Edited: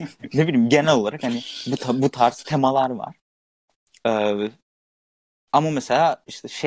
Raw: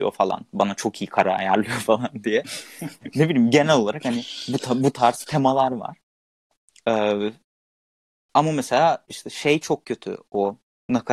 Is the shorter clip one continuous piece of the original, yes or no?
yes